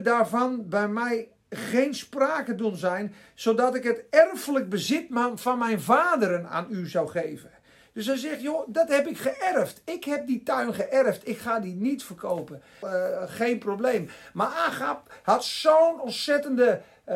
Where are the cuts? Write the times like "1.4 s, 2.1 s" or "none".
12.8 s